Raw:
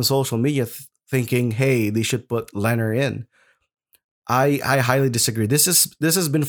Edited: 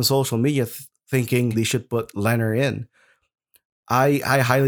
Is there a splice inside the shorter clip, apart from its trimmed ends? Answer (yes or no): yes